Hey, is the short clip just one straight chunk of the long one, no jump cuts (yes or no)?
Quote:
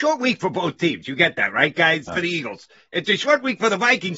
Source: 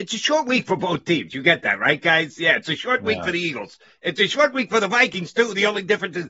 no